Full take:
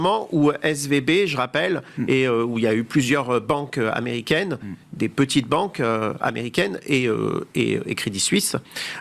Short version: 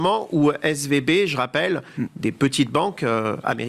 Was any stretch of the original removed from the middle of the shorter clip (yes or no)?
yes